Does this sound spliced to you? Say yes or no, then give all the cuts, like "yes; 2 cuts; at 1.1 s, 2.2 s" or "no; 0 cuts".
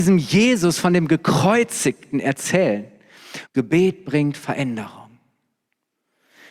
yes; 1 cut; at 3.5 s